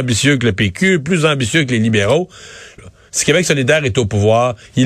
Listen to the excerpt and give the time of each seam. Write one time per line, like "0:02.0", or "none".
0:02.8

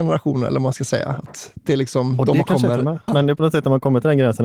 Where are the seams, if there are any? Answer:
0:03.1

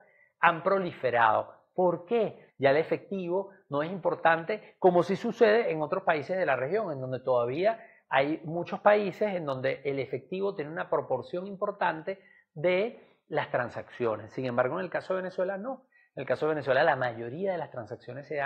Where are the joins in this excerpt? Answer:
0:02.5

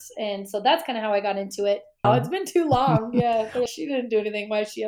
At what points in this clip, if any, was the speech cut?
0:02.0
0:03.7

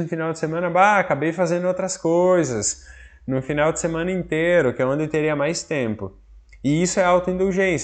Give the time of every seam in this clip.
none

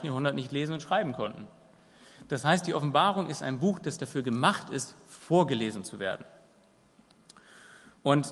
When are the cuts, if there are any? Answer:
none

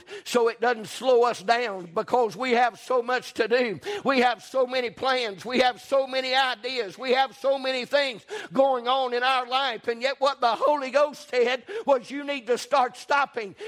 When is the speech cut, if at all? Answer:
none

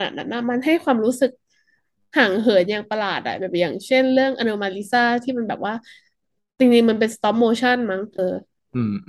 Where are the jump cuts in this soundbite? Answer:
0:08.2

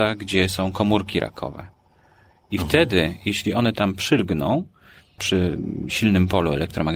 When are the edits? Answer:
0:05.2

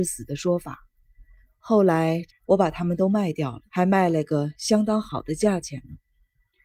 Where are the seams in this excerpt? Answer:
0:02.3
0:03.7

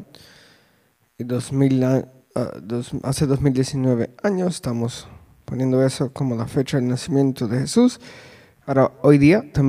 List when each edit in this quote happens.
0:08.6

